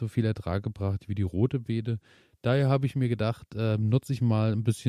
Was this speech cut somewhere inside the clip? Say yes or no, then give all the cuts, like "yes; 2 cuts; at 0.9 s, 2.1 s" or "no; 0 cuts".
no; 0 cuts